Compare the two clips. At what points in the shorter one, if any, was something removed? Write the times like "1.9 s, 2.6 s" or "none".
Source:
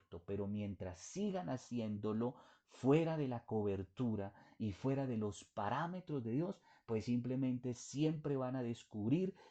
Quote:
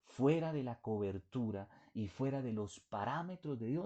none